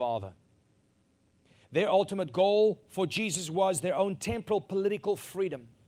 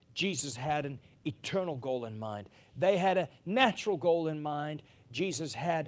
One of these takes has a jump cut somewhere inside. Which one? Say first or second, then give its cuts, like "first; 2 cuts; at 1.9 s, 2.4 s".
first; 1 cut; at 1.6 s